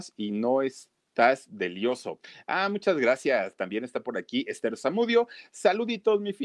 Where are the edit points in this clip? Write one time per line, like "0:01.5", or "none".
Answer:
0:01.0